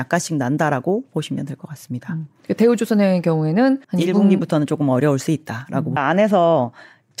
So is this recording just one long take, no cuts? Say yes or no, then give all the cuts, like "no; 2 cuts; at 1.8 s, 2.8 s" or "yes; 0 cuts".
no; 2 cuts; at 3.8 s, 6.0 s